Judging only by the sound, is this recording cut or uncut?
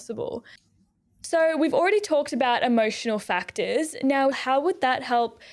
cut